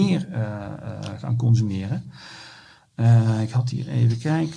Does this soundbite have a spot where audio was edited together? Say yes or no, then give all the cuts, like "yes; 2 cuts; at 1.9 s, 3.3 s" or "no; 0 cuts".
no; 0 cuts